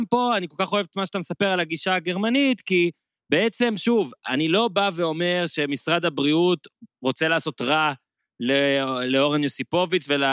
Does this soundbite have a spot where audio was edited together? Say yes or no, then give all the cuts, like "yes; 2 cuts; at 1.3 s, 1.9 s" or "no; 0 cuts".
no; 0 cuts